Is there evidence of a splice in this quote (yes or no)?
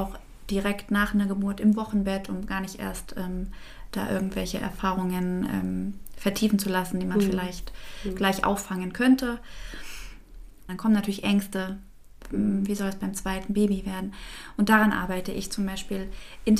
yes